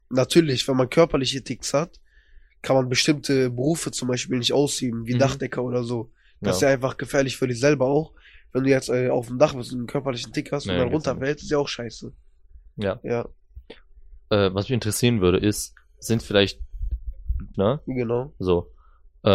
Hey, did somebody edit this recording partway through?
yes; 1 cut; at 17.5 s

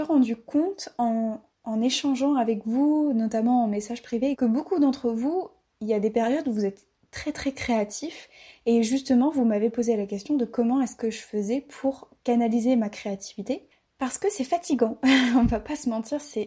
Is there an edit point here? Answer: yes; 1 cut; at 4.3 s

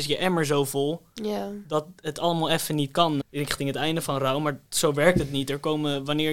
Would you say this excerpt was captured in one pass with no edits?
no; 1 cut; at 3.2 s

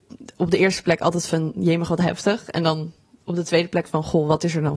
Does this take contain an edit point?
no; 0 cuts

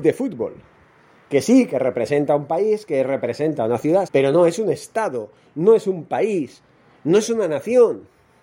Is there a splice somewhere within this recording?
yes; 1 cut; at 4.1 s

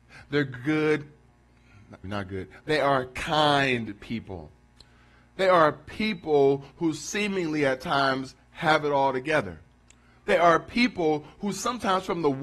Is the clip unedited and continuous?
no; 1 cut; at 2.0 s

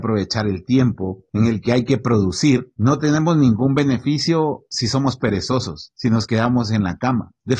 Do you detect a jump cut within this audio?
no; 0 cuts

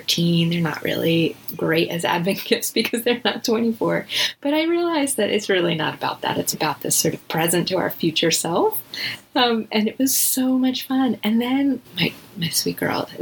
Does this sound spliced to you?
yes; 2 cuts; at 6.5 s, 11.8 s

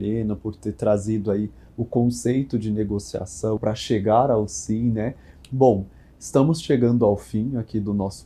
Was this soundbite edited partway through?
yes; 2 cuts; at 3.6 s, 5.4 s

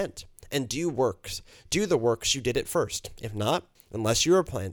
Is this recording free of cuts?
no; 1 cut; at 3.8 s

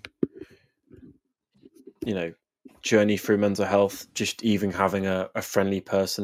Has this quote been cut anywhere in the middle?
no; 0 cuts

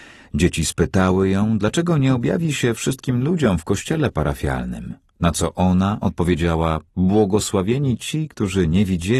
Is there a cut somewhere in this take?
yes; 1 cut; at 6.9 s

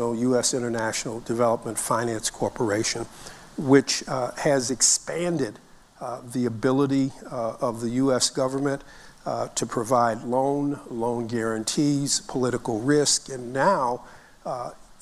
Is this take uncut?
yes; 0 cuts

